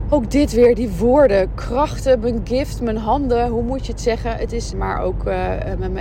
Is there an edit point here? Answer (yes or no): yes